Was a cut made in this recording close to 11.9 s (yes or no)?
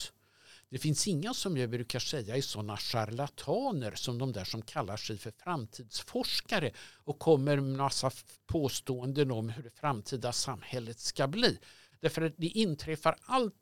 yes